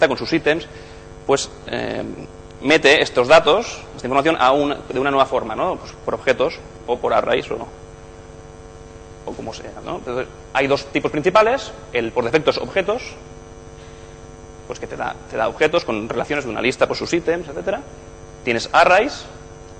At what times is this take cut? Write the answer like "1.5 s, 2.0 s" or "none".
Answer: none